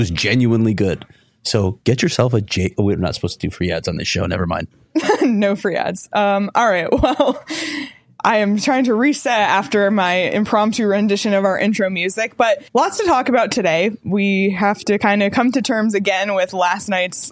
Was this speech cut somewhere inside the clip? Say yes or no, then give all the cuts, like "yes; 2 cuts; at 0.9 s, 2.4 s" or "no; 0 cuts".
yes; 1 cut; at 12.7 s